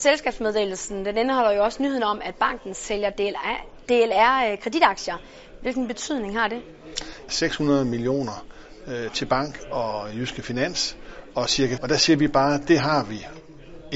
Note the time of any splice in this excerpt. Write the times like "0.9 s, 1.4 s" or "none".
7.3 s, 11.8 s